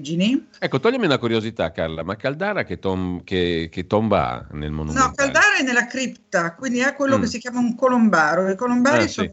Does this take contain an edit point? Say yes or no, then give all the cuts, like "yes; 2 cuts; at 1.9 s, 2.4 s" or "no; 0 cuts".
no; 0 cuts